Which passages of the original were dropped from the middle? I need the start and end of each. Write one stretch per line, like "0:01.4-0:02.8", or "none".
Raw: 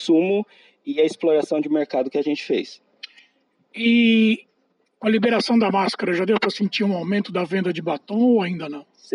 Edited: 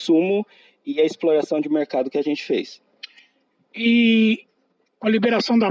none